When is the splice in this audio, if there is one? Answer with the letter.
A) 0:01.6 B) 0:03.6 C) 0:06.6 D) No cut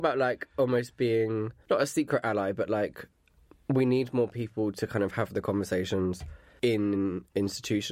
A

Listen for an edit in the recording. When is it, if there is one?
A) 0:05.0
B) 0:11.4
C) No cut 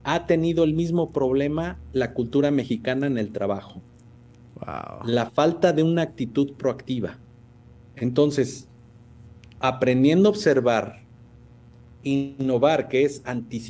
C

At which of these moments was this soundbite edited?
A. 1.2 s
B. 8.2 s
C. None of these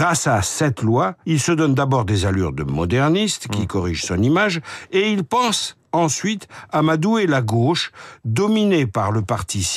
A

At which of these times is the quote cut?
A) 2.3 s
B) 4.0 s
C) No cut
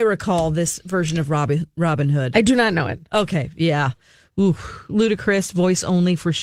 C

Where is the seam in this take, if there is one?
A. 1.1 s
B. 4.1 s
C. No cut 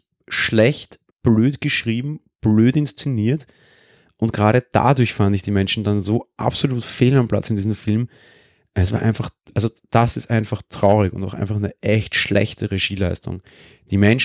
A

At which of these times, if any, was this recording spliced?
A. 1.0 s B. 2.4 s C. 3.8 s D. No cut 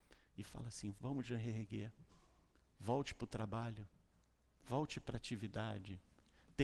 A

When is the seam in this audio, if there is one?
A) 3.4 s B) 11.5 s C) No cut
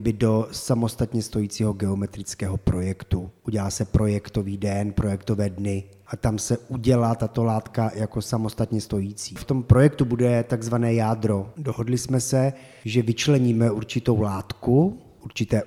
B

